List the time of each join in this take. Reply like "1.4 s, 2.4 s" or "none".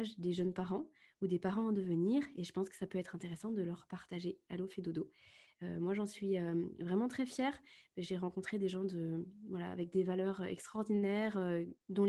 none